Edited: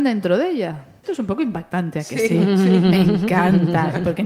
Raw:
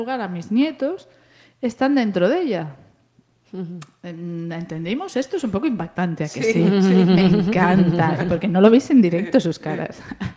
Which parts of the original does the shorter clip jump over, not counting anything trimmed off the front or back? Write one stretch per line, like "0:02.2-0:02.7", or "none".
0:02.9-0:05.3